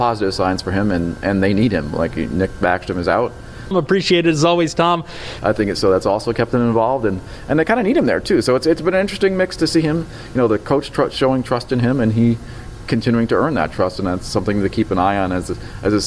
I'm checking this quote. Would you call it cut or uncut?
cut